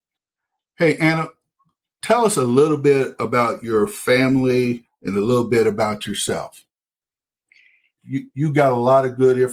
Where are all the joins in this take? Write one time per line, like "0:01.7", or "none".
0:08.0